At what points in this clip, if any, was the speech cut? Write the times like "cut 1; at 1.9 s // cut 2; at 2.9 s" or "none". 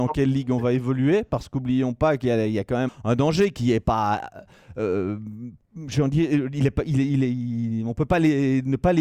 cut 1; at 2.9 s // cut 2; at 5.6 s